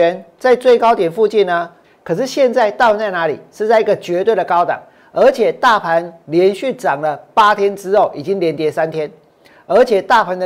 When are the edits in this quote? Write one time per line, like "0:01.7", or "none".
0:01.8